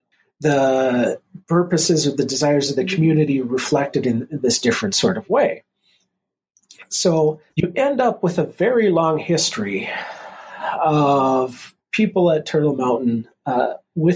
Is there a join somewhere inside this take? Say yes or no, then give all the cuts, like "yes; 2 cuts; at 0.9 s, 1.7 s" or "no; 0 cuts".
yes; 1 cut; at 7.5 s